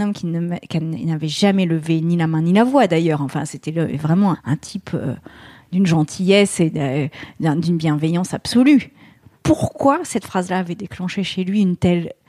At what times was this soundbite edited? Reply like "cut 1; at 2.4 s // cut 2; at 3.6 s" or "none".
cut 1; at 4.3 s

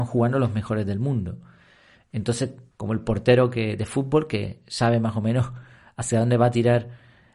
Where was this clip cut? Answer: cut 1; at 2.7 s

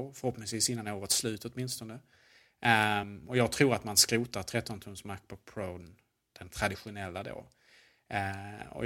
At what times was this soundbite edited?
none

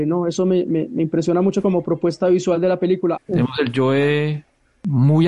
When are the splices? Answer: cut 1; at 3.2 s

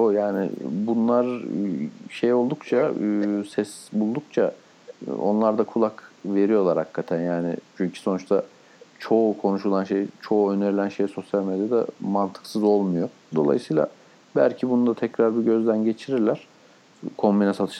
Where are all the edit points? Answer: cut 1; at 13.3 s

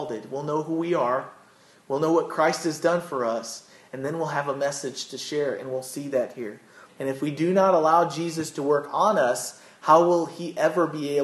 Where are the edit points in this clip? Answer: cut 1; at 6.9 s

